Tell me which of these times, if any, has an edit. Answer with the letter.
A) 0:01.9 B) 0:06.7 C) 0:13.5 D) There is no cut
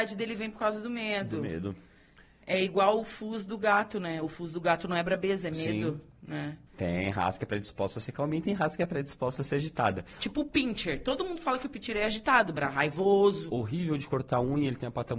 B